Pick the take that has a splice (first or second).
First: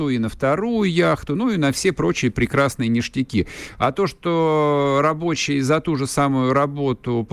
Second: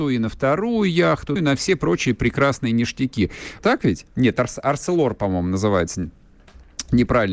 second